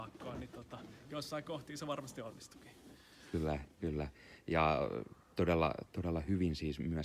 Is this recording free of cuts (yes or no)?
yes